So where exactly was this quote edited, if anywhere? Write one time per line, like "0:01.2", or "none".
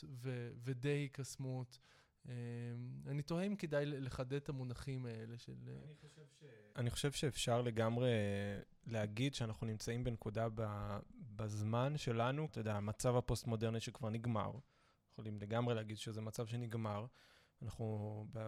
0:06.7
0:12.5